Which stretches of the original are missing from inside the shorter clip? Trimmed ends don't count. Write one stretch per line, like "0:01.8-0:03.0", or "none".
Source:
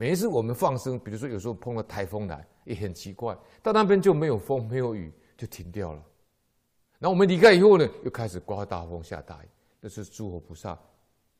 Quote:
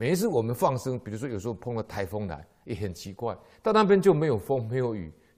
none